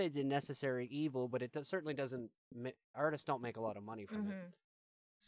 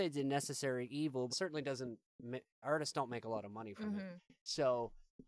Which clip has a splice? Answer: second; 2 cuts; at 1.3 s, 4.2 s

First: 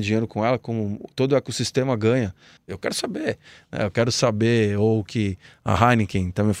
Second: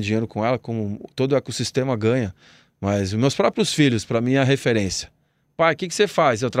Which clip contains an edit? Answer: first; 1 cut; at 2.6 s

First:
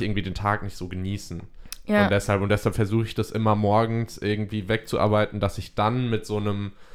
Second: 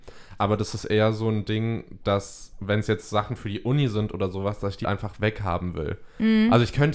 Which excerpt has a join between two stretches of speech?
second; 1 cut; at 4.8 s

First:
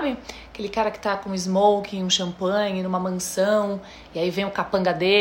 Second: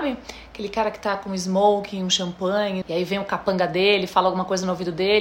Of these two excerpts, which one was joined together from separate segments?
second; 1 cut; at 2.8 s

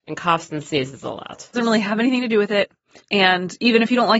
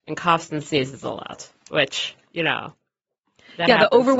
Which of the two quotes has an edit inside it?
first; 2 cuts; at 1.5 s, 3.0 s

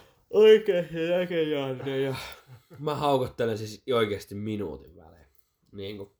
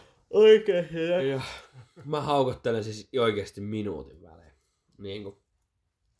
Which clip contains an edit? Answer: second; 1 cut; at 1.2 s

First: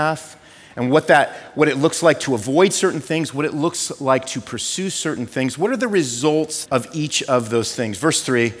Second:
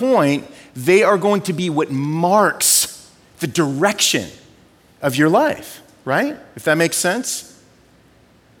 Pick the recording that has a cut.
first; 1 cut; at 6.7 s

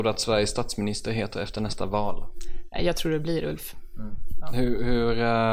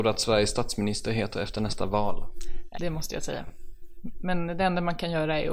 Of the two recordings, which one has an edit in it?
second; 1 cut; at 2.7 s

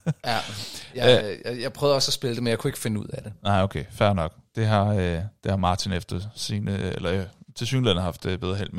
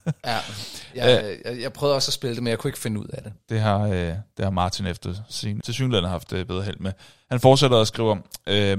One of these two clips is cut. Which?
second; 2 cuts; at 3.4 s, 5.6 s

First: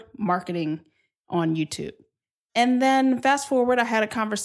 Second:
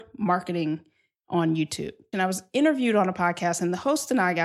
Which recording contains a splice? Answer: second; 1 cut; at 2.1 s

